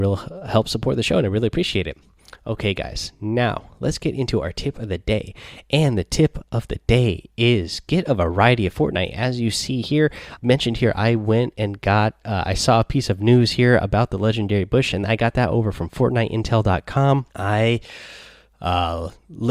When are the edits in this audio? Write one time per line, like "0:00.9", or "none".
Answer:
0:10.4
0:17.3